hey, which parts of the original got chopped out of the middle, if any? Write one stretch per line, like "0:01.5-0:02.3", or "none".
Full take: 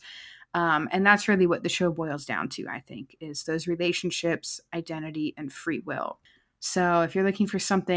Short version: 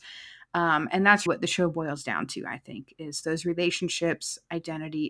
0:01.3-0:01.5